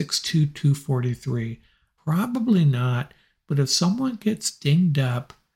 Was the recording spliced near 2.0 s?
yes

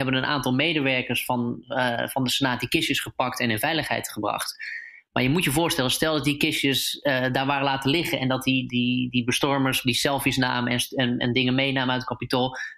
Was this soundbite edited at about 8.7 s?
yes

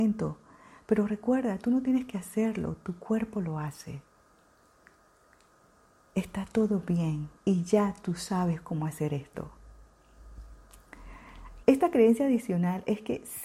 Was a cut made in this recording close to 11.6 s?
yes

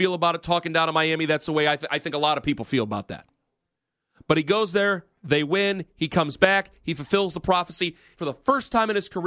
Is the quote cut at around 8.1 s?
yes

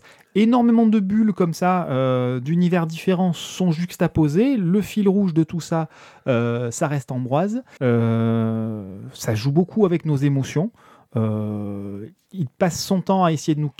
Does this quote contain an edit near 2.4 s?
no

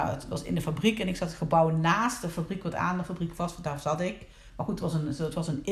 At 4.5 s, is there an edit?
yes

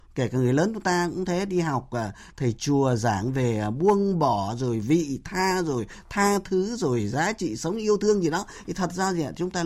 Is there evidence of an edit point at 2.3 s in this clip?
yes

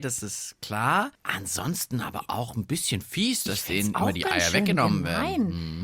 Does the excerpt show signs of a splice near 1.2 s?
yes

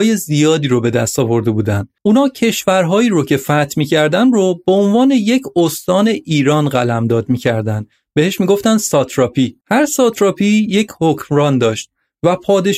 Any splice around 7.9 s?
no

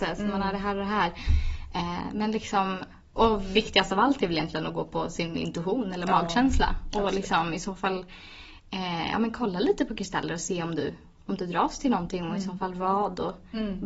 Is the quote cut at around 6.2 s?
no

